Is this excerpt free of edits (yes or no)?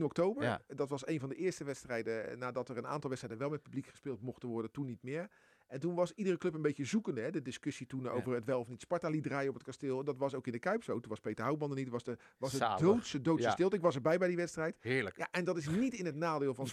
yes